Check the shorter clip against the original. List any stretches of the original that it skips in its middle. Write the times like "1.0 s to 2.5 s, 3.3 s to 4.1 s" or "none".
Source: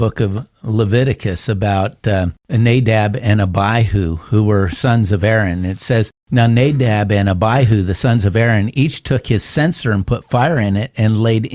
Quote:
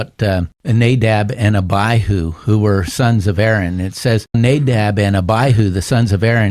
6.2 s to 6.5 s